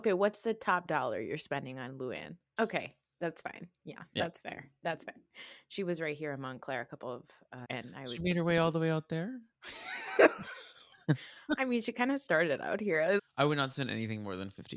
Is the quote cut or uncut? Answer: cut